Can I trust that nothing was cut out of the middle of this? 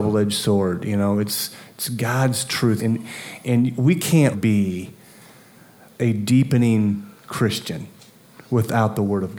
no; 2 cuts; at 2.8 s, 4.3 s

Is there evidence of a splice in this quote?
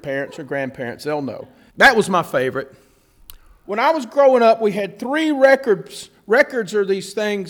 yes; 2 cuts; at 1.7 s, 3.6 s

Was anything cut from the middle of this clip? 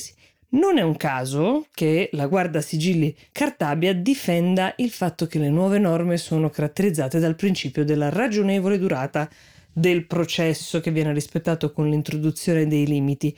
no; 0 cuts

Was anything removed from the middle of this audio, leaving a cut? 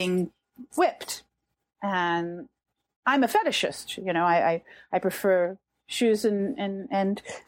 no; 0 cuts

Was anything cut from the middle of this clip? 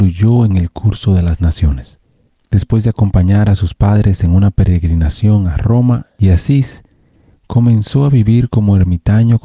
no; 0 cuts

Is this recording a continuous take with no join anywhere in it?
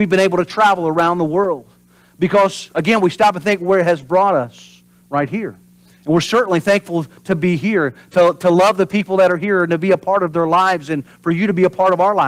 yes; 0 cuts

